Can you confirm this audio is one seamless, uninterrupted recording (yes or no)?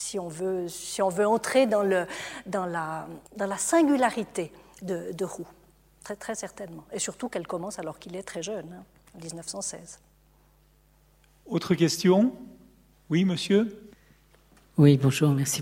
no